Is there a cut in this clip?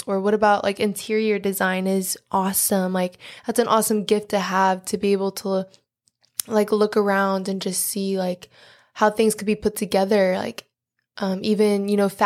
no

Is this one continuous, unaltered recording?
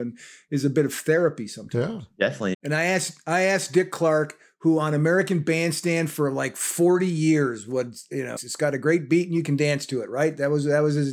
no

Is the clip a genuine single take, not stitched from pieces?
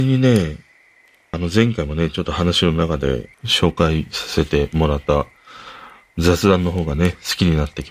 no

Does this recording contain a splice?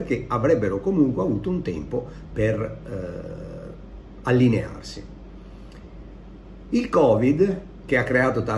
no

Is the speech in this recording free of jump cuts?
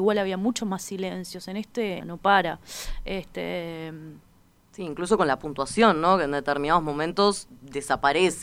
no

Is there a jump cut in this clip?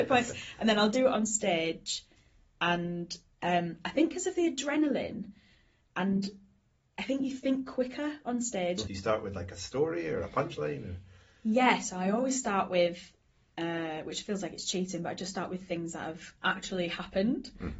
yes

